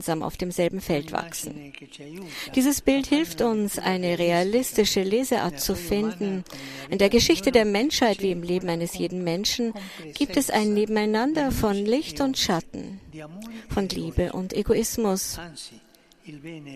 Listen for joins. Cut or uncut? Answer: uncut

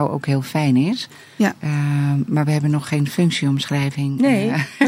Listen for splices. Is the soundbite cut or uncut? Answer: uncut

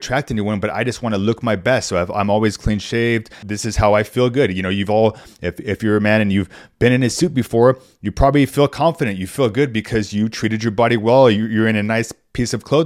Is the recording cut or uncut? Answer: cut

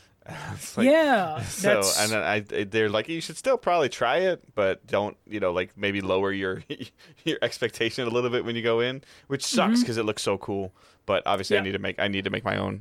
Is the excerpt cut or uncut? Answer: uncut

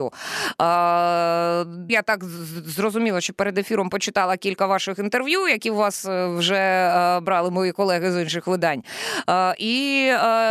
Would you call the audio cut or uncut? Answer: cut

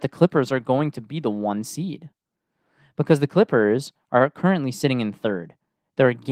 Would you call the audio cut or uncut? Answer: uncut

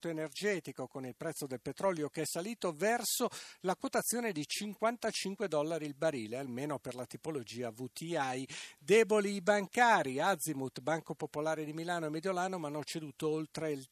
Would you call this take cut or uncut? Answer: uncut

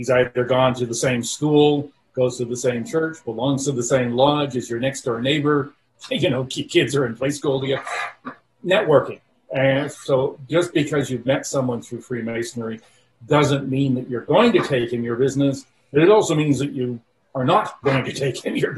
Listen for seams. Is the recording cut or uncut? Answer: uncut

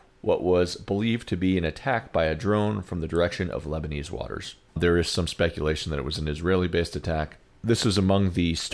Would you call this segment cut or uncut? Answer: cut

